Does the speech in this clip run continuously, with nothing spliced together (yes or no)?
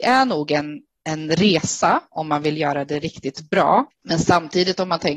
no